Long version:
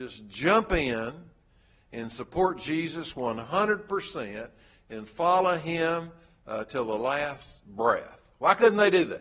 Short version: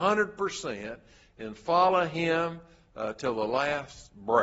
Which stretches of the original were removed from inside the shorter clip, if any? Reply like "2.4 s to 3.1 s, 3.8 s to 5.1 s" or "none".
none